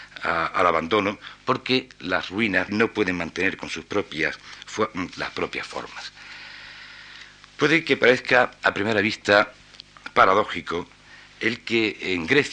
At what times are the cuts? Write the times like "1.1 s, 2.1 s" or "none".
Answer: 2.7 s, 5.1 s